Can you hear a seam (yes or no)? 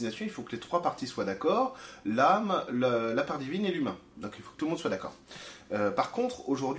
no